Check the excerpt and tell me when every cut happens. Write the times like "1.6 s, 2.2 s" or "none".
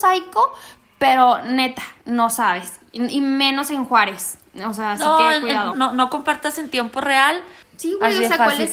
5.7 s, 7.6 s